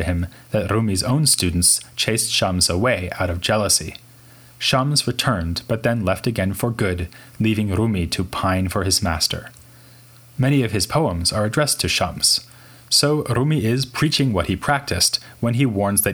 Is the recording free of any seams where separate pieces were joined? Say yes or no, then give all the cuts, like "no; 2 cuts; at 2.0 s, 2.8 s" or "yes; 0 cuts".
yes; 0 cuts